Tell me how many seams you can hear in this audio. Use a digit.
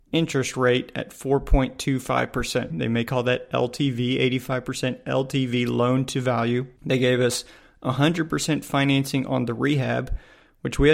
2